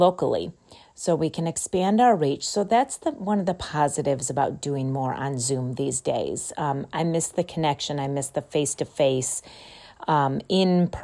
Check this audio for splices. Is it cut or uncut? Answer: uncut